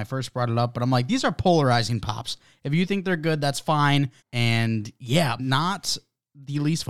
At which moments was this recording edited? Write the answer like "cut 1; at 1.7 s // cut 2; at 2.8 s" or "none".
cut 1; at 4.2 s // cut 2; at 5.4 s